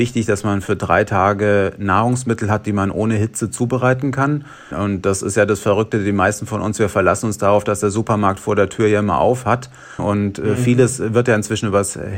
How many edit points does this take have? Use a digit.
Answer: 2